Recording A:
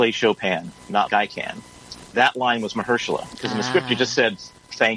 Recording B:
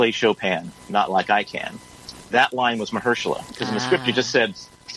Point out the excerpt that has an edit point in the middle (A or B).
A